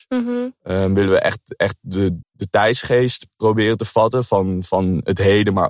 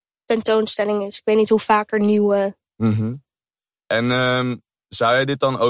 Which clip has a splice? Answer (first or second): first